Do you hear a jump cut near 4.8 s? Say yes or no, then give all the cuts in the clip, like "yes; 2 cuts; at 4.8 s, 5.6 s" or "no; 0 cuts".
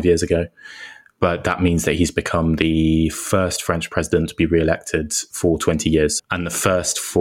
no; 1 cut; at 6.2 s